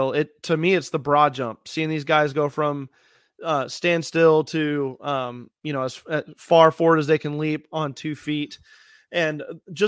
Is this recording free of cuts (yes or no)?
yes